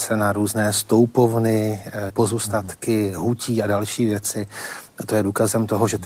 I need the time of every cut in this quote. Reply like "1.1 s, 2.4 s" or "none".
2.1 s